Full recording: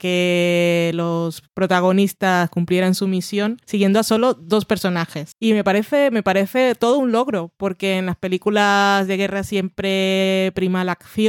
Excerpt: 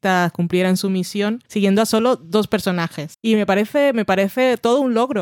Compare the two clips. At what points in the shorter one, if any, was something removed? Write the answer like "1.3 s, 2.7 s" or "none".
none